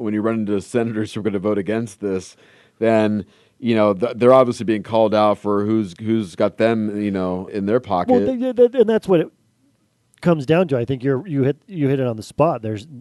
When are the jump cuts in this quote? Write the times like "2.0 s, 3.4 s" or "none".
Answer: 7.5 s